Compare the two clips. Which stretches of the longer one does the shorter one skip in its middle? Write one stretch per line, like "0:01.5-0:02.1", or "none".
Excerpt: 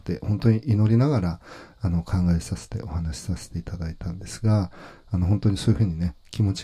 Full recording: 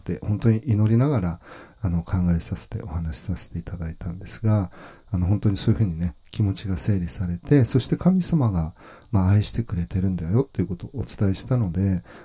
none